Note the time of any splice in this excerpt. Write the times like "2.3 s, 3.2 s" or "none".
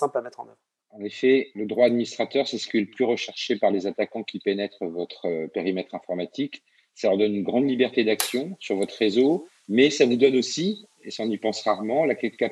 none